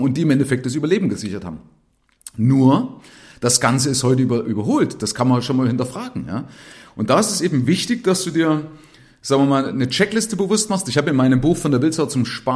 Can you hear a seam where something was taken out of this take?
no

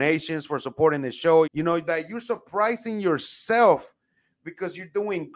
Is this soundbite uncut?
no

